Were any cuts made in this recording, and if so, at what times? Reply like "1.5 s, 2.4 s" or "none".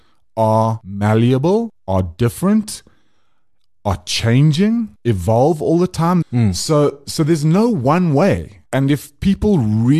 6.2 s, 8.7 s